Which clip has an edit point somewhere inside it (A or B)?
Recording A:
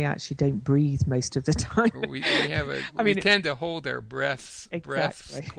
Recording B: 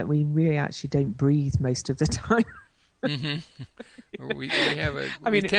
A